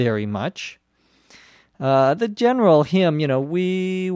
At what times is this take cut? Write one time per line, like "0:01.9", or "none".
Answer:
none